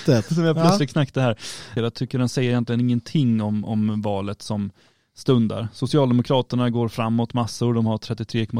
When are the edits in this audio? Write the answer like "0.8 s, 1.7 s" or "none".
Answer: 1.8 s